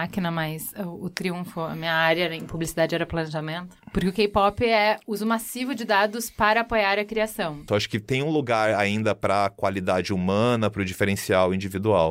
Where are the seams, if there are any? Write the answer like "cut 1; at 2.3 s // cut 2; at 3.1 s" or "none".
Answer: cut 1; at 3.8 s // cut 2; at 7.7 s